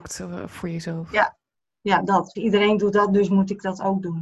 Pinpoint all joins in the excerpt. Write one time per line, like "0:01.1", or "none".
0:02.3